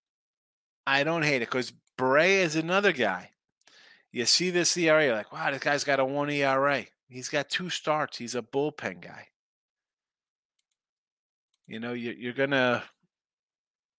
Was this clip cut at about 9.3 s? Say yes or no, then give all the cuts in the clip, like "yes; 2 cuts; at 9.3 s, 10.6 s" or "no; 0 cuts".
no; 0 cuts